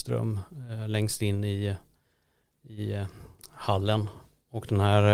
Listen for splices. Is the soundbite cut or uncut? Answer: uncut